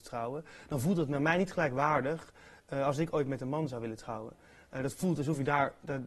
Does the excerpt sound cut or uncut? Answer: uncut